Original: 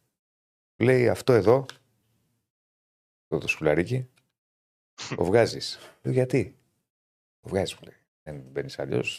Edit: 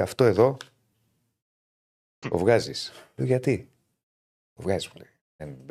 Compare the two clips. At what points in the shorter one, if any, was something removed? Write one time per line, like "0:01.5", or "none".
0:02.2